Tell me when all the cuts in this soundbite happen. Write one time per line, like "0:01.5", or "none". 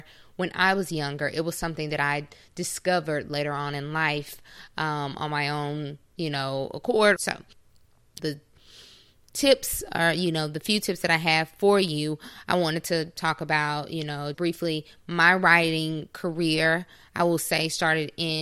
0:07.2
0:08.2
0:14.3